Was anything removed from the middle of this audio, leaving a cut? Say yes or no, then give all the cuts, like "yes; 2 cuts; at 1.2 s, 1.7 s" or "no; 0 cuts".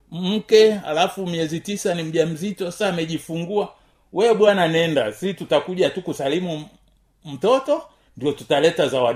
no; 0 cuts